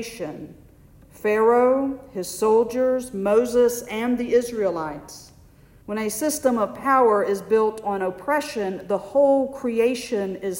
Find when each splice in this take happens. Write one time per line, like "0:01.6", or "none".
0:05.8